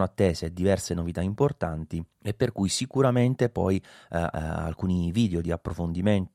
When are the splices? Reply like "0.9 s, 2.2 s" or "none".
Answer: 2.1 s, 4.3 s